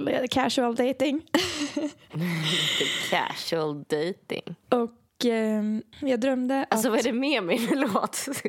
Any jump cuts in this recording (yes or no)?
no